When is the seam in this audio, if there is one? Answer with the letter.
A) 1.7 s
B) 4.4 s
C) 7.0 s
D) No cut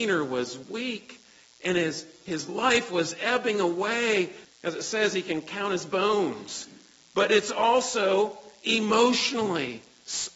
B